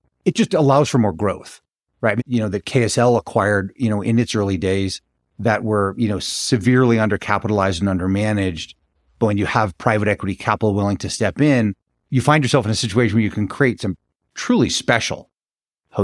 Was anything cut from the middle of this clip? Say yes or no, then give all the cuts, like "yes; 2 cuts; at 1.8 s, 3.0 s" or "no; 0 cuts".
yes; 1 cut; at 2.2 s